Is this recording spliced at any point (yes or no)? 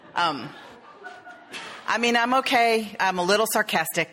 yes